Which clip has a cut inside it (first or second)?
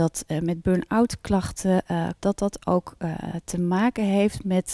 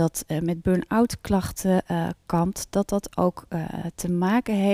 first